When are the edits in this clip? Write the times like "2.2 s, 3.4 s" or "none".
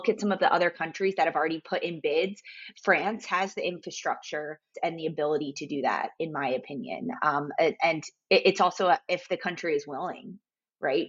4.7 s

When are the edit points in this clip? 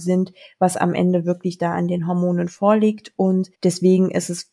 3.5 s

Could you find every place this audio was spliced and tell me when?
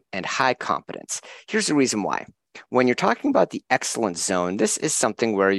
none

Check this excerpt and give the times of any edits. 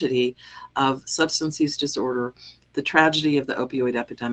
none

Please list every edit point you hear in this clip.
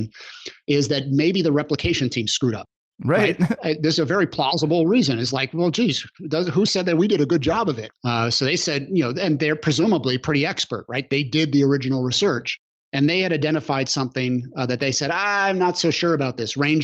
7.9 s

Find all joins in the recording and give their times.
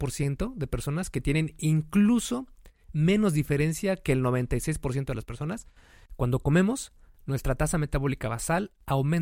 6.1 s

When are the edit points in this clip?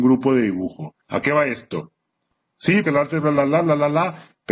1.0 s, 2.8 s

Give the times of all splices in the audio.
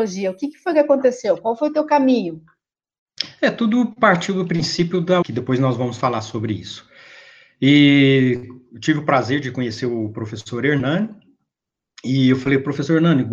5.2 s

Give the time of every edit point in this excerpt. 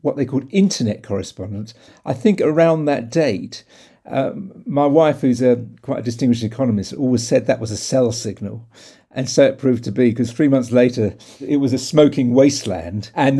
none

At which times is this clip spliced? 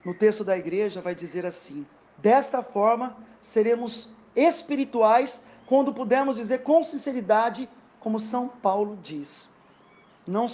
2.1 s

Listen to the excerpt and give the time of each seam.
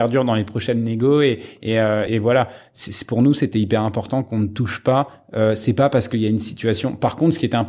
2.1 s

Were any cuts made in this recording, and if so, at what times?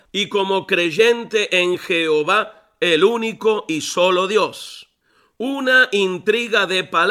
none

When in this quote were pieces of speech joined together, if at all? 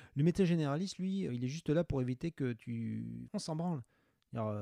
1.3 s, 3.3 s

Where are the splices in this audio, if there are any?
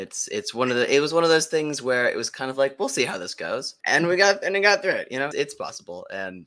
3.8 s, 5.3 s

